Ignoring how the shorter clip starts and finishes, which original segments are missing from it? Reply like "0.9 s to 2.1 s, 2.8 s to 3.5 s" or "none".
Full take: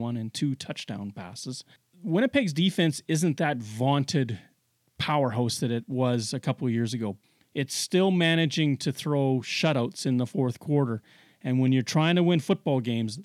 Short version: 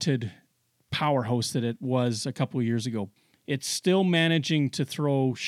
none